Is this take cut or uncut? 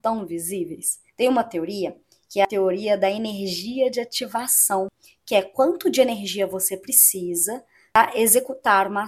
cut